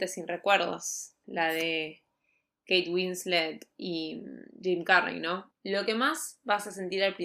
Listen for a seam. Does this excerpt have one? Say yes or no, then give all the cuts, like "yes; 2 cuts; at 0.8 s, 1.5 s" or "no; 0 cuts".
yes; 2 cuts; at 1.2 s, 5.5 s